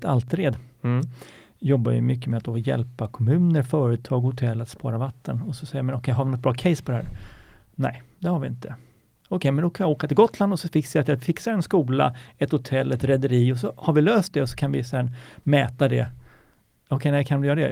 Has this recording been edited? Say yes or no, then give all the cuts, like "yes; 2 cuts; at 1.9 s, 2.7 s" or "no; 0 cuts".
no; 0 cuts